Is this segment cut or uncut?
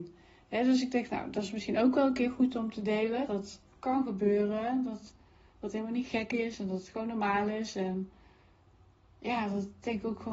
cut